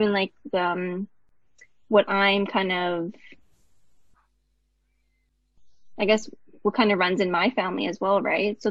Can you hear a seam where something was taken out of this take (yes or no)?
no